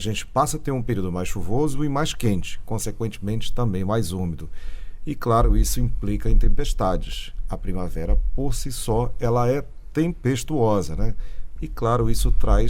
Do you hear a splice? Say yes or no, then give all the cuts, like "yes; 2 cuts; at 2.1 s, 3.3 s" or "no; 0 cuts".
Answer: yes; 1 cut; at 11.6 s